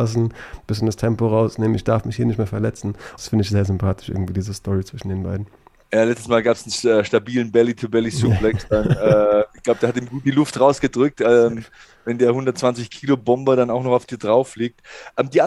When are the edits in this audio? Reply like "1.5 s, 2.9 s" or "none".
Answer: 3.2 s